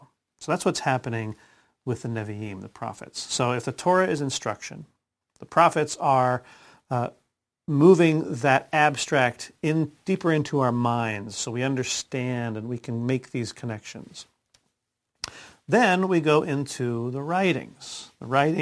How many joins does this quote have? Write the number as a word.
zero